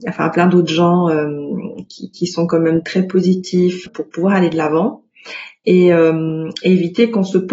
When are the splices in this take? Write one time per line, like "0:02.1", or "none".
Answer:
0:01.9
0:03.9